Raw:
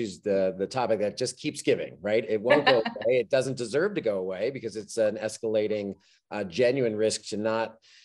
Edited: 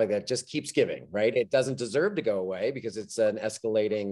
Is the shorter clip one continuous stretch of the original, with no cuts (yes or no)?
no